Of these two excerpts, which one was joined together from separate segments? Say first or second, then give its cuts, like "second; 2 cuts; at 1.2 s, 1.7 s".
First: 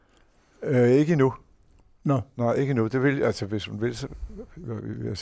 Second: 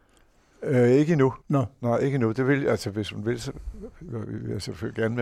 second; 1 cut; at 1.4 s